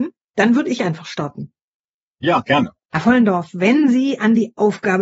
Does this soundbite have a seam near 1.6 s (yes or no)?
no